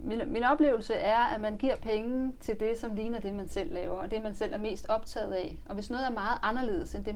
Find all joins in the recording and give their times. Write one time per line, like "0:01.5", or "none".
none